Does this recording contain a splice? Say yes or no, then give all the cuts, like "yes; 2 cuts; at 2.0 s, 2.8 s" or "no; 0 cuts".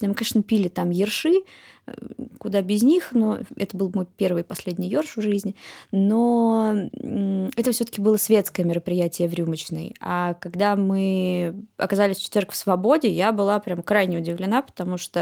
no; 0 cuts